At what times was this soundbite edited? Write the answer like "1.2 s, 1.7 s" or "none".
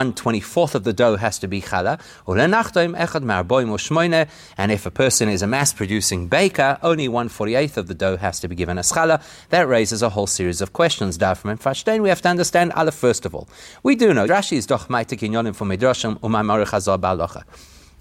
14.3 s